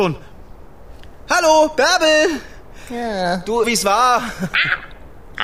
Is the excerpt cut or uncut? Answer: cut